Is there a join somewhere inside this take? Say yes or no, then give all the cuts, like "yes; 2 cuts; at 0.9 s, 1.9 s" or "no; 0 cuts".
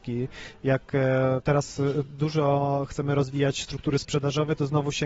no; 0 cuts